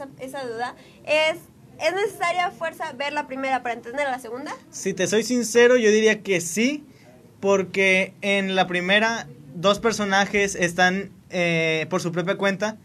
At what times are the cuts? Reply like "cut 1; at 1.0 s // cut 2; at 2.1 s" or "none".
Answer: none